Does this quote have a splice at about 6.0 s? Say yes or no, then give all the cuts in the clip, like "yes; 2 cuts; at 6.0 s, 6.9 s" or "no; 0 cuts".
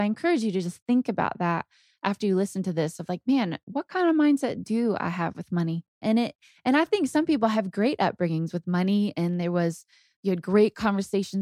yes; 1 cut; at 6.0 s